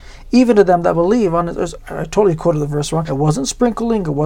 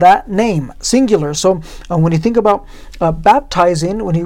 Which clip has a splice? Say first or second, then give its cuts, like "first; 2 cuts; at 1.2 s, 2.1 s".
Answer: first; 1 cut; at 3.1 s